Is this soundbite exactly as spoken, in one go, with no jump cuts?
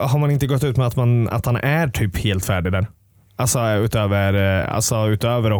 yes; 0 cuts

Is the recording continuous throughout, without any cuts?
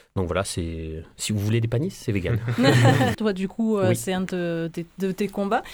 no; 1 cut; at 3.1 s

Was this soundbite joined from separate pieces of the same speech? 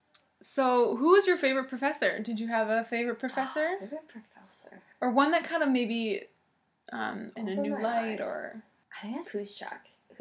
yes; 2 cuts; at 7.3 s, 9.2 s

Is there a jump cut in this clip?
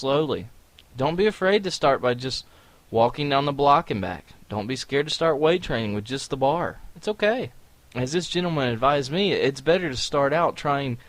yes; 1 cut; at 7.7 s

